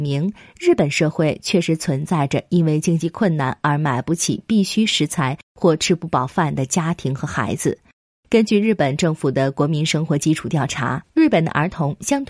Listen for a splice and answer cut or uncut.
uncut